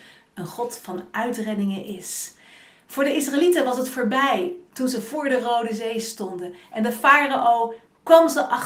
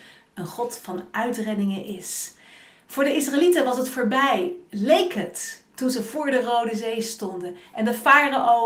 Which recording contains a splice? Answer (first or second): first